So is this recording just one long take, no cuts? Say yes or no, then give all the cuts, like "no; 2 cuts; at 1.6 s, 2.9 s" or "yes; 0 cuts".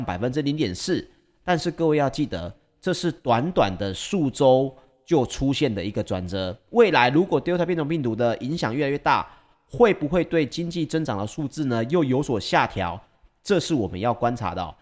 yes; 0 cuts